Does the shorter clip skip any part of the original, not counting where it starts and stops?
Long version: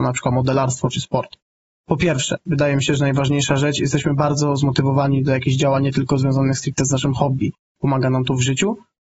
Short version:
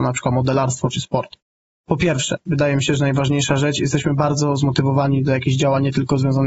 no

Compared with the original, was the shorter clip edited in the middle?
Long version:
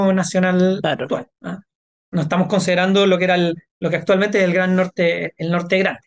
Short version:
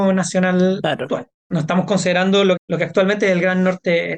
yes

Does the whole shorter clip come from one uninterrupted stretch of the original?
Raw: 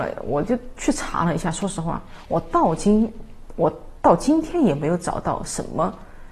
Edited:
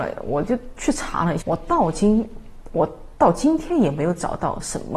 no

